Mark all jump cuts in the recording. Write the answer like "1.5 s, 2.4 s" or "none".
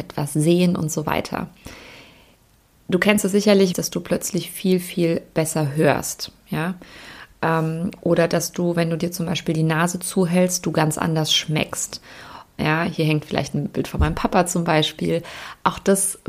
3.7 s, 12.6 s